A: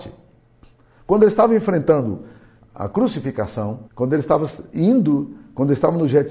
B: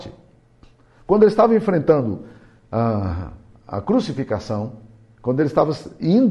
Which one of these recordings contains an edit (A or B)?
A